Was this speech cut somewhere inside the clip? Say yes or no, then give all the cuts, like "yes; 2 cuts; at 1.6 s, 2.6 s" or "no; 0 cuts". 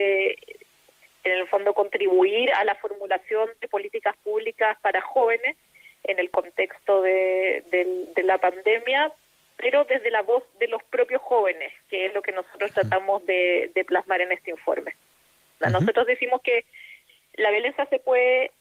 yes; 1 cut; at 15.6 s